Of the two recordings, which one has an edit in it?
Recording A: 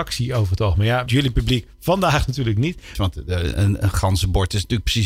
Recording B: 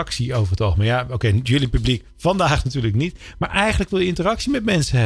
A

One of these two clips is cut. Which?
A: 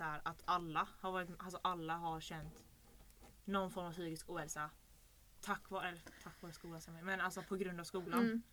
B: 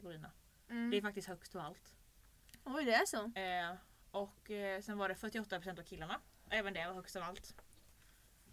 B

